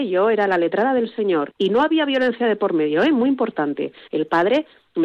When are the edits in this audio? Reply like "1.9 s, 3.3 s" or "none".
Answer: 4.1 s